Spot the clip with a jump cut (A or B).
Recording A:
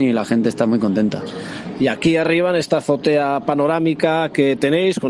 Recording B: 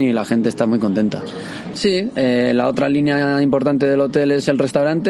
B